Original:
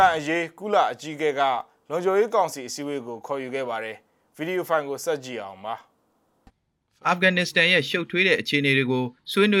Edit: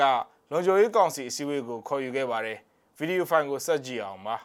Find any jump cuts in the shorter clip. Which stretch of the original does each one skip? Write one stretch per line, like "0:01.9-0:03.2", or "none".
none